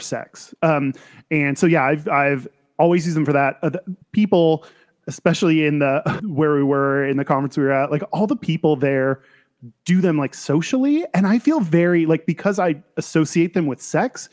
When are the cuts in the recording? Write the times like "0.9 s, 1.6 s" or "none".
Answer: 4.0 s, 6.2 s